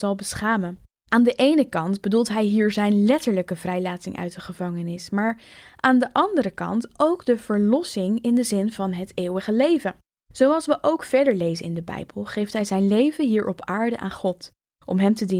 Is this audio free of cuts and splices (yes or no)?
no